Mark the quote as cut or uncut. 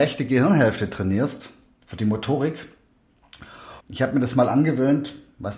cut